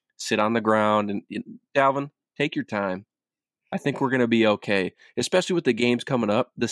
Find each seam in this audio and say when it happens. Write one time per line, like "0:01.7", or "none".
none

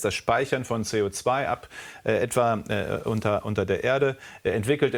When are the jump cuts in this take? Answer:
none

